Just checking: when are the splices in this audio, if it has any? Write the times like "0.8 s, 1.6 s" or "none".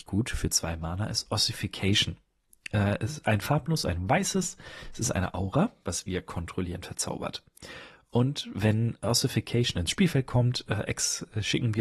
5.8 s